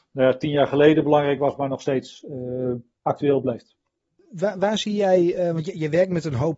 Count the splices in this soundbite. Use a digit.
0